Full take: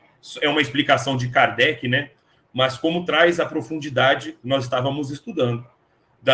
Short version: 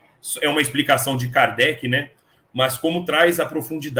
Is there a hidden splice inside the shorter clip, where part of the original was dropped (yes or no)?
no